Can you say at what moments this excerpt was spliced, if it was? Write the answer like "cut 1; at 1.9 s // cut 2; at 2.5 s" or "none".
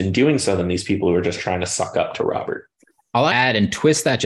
cut 1; at 3.3 s